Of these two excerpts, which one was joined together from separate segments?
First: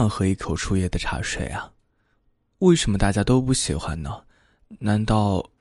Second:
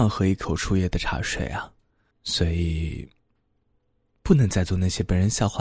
second; 1 cut; at 2.1 s

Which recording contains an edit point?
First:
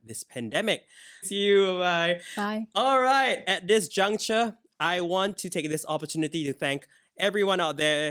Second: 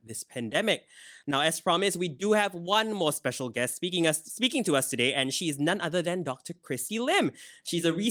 first; 1 cut; at 1.2 s

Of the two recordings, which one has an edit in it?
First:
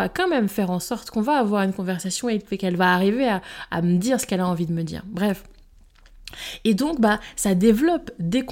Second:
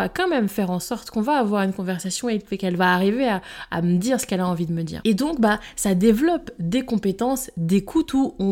second; 1 cut; at 5.0 s

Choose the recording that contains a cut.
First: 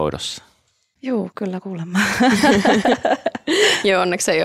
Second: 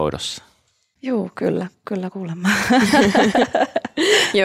first; 1 cut; at 1.3 s

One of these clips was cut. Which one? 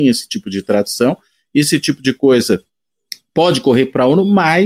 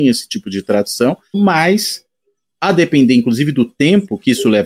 second; 1 cut; at 1.3 s

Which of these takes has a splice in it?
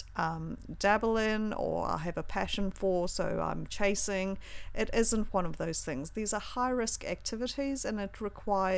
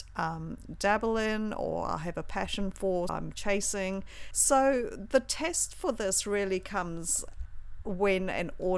second; 2 cuts; at 3.1 s, 4.3 s

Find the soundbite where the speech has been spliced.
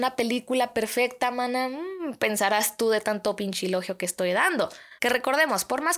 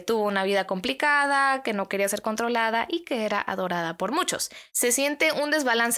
first; 1 cut; at 5.0 s

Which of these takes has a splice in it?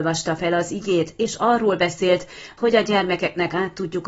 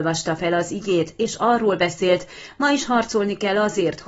first; 1 cut; at 2.6 s

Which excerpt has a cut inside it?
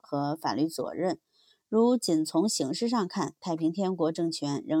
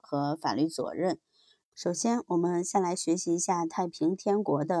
second; 1 cut; at 1.6 s

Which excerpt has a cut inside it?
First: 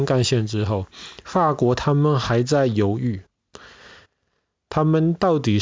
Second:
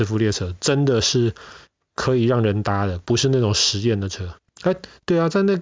second; 1 cut; at 4.5 s

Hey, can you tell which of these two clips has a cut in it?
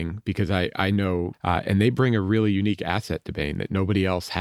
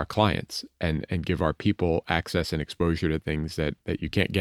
first; 1 cut; at 1.3 s

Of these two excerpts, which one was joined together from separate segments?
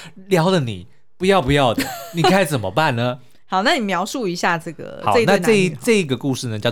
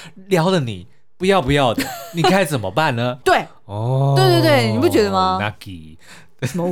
second; 1 cut; at 3.2 s

